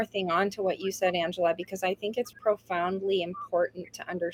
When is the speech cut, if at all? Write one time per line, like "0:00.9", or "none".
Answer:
0:02.3